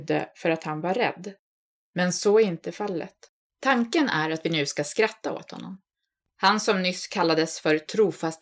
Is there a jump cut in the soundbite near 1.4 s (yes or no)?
no